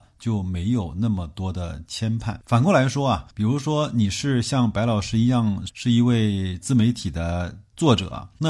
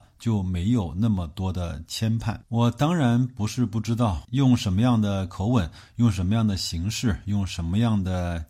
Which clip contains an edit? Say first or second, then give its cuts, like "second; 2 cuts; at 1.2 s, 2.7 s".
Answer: first; 2 cuts; at 2.4 s, 5.7 s